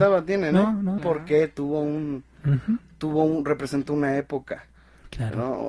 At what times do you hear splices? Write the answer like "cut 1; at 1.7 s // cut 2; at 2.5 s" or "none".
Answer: cut 1; at 1.0 s